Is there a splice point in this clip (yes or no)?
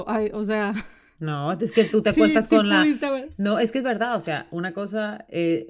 no